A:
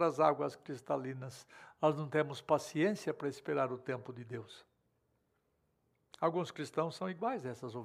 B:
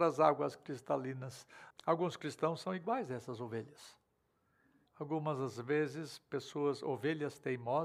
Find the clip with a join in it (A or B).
B